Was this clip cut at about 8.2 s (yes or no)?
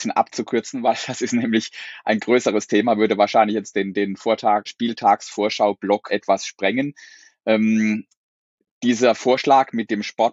no